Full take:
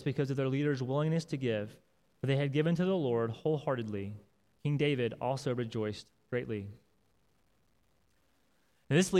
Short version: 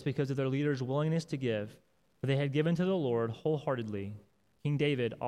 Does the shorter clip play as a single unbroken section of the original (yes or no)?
yes